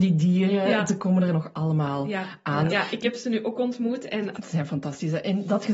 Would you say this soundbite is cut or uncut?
cut